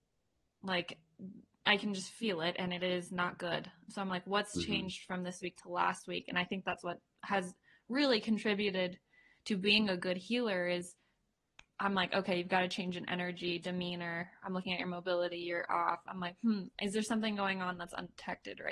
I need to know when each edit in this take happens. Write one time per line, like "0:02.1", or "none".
none